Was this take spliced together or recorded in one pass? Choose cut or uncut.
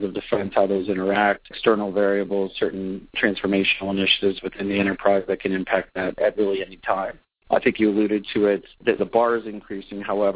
cut